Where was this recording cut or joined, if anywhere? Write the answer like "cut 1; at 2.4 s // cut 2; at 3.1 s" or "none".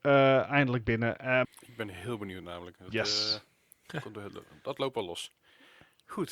cut 1; at 1.4 s